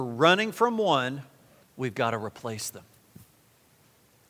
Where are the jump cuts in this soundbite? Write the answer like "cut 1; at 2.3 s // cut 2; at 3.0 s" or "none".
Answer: cut 1; at 1.6 s